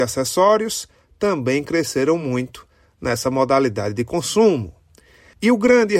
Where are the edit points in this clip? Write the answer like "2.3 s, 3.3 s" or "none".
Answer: none